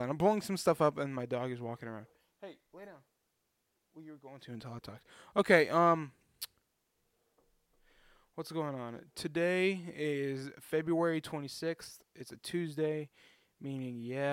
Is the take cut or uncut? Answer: uncut